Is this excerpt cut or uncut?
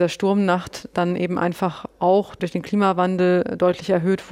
uncut